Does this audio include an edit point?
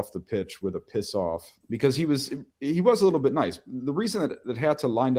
yes; 1 cut; at 1.6 s

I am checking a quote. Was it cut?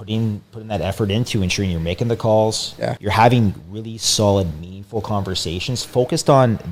yes; 1 cut; at 3.0 s

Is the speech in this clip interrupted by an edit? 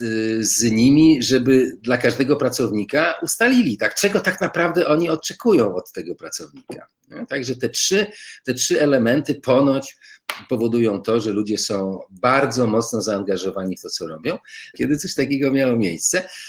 yes; 1 cut; at 14.7 s

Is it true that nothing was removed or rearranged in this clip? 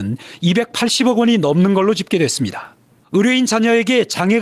no; 1 cut; at 3.0 s

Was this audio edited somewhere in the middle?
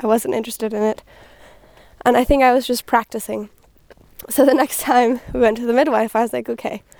no; 0 cuts

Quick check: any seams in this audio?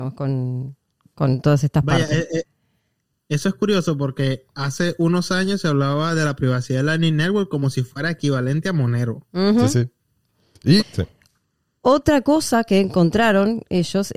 yes; 1 cut; at 10.8 s

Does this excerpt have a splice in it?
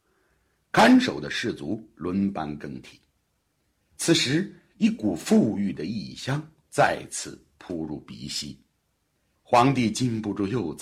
no; 0 cuts

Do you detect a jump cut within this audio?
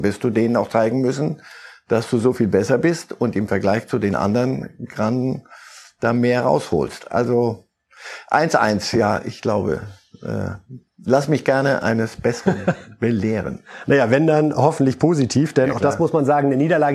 no; 0 cuts

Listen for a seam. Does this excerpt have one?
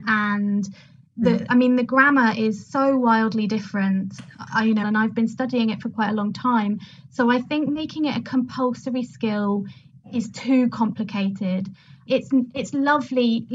yes; 2 cuts; at 4.8 s, 12.1 s

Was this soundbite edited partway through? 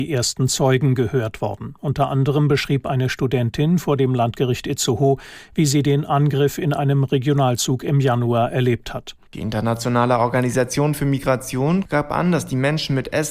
yes; 1 cut; at 9.3 s

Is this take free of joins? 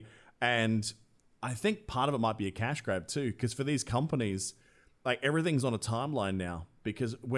yes; 0 cuts

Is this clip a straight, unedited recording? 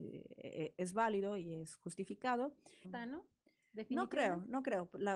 no; 1 cut; at 2.8 s

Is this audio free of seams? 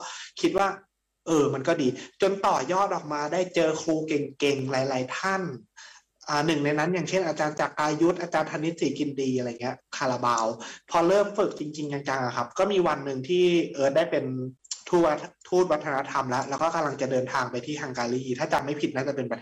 yes; 0 cuts

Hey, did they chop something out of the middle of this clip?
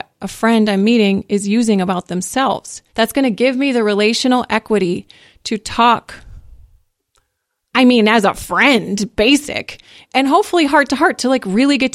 yes; 2 cuts; at 2.9 s, 10.0 s

